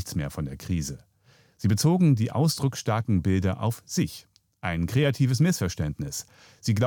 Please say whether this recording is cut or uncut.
uncut